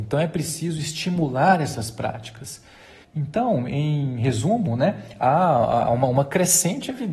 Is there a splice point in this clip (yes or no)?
yes